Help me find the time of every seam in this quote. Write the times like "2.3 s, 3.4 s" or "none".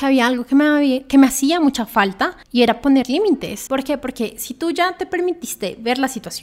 2.4 s, 3.7 s